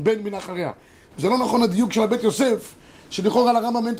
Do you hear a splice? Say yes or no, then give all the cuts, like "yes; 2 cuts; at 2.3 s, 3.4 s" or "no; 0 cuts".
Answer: yes; 1 cut; at 1.1 s